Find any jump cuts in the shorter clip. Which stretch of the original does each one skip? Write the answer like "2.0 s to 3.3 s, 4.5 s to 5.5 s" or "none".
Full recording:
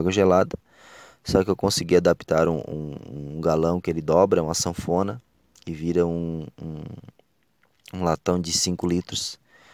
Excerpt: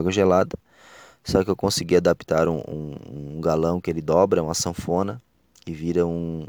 none